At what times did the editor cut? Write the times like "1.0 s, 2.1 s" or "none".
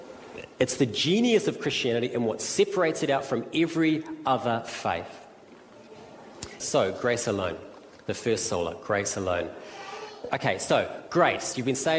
6.6 s, 10.3 s